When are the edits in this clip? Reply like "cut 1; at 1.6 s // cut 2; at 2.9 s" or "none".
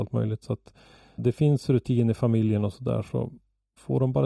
cut 1; at 1.2 s